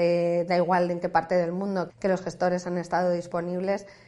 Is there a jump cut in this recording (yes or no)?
yes